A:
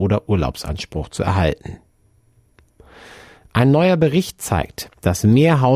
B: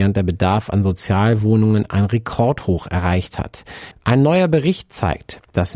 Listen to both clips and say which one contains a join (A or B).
B